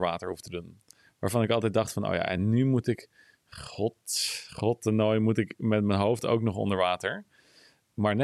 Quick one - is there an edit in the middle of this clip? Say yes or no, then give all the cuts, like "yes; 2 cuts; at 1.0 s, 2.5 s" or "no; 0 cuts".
no; 0 cuts